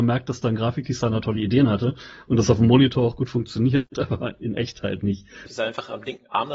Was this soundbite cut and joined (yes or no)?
yes